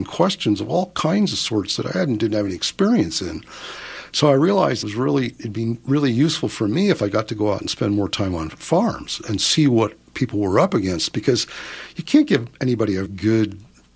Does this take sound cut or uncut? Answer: cut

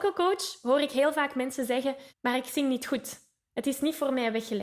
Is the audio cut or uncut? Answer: cut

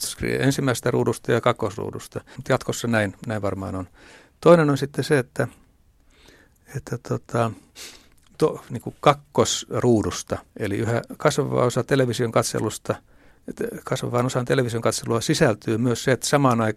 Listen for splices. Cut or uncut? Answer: cut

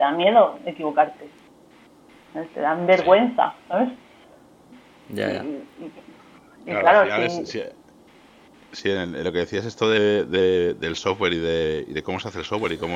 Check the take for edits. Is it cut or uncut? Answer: uncut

